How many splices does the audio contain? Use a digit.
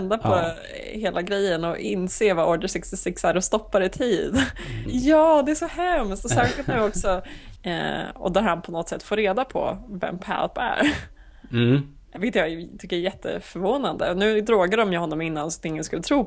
3